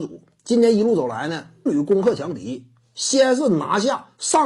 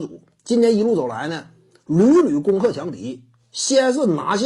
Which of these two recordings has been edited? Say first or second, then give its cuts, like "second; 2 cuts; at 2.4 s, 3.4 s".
first; 1 cut; at 1.7 s